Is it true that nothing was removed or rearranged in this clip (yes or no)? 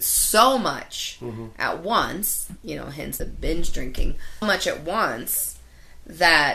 no